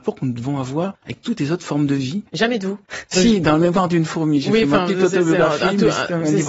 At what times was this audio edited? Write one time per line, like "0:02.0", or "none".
0:02.3